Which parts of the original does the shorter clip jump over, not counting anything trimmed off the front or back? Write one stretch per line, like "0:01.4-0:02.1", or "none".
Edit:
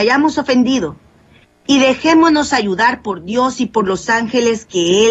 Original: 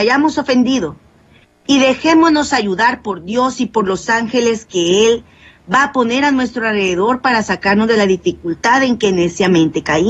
none